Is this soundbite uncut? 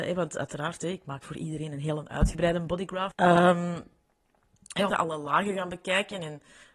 no; 2 cuts; at 3.1 s, 4.9 s

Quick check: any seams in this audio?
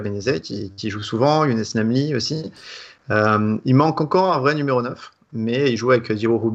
no; 0 cuts

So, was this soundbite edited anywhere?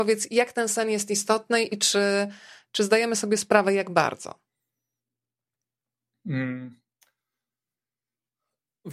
no; 0 cuts

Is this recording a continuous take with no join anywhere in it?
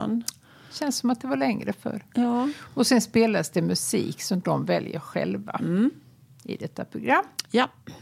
yes; 0 cuts

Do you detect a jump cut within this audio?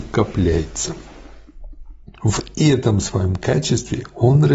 yes; 1 cut; at 2.2 s

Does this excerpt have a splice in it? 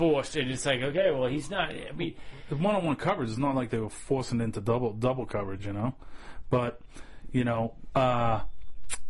no; 0 cuts

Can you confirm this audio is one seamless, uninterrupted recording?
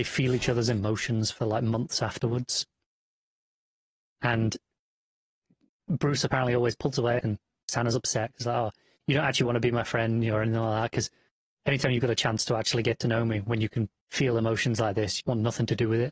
no; 3 cuts; at 7.2 s, 14.0 s, 15.2 s

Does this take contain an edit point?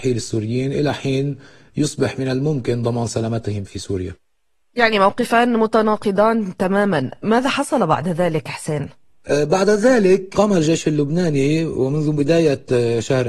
yes; 1 cut; at 3.7 s

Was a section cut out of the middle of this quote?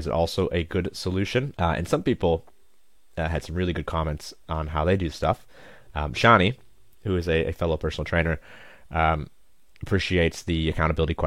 yes; 1 cut; at 1.5 s

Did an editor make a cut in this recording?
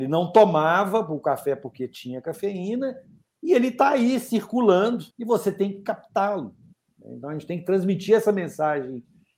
yes; 1 cut; at 5.1 s

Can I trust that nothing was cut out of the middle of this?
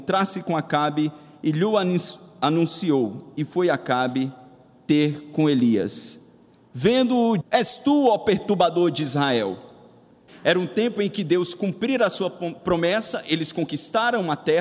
no; 2 cuts; at 7.4 s, 10.3 s

